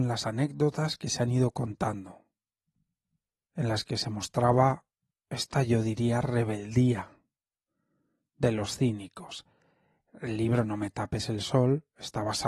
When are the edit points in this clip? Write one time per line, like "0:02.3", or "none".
none